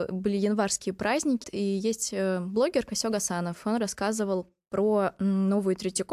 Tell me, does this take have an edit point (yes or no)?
yes